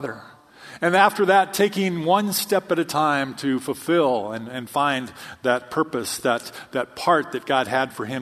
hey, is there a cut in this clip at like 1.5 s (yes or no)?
no